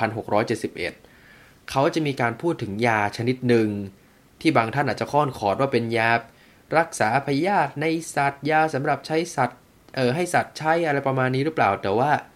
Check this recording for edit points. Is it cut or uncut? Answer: uncut